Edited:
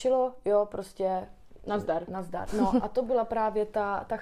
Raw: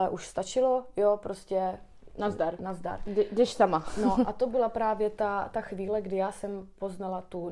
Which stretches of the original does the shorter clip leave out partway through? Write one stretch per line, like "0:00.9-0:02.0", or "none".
0:03.0-0:03.9